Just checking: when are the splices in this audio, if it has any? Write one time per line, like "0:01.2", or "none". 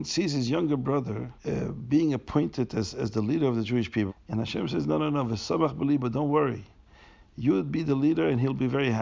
0:01.4
0:04.1